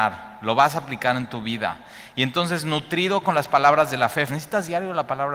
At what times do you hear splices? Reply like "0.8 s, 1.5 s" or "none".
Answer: 4.3 s